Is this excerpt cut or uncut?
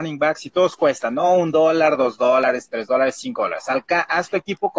uncut